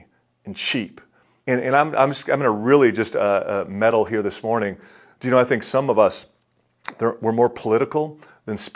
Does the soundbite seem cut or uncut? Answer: cut